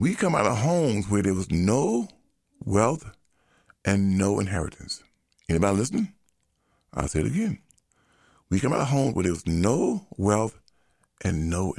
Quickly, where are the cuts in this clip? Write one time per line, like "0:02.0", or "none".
none